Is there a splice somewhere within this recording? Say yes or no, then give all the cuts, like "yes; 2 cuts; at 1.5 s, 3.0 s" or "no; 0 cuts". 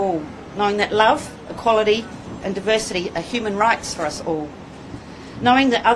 yes; 1 cut; at 2.4 s